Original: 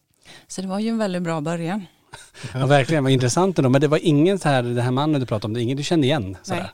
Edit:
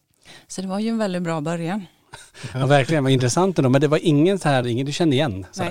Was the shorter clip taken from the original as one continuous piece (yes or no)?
no